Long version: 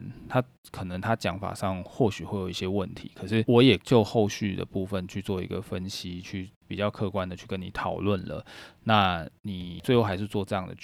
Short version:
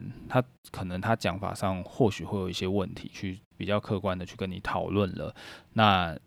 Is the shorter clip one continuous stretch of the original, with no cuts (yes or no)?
no